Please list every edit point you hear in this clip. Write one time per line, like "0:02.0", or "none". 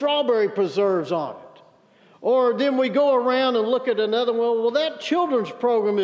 none